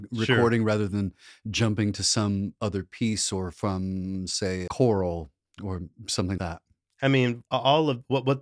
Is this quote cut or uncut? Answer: cut